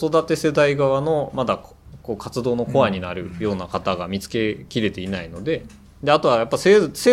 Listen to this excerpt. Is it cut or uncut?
uncut